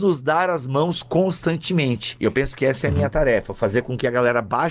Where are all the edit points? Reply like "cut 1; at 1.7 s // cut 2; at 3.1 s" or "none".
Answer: none